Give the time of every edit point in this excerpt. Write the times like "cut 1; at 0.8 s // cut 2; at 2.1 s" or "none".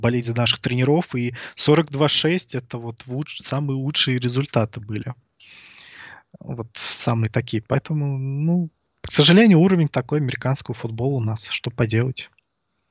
none